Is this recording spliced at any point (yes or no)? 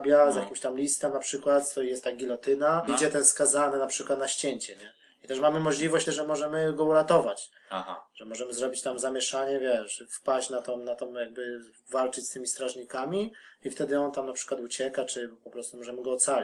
yes